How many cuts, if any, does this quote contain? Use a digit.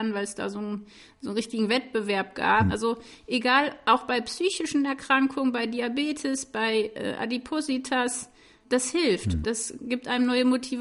2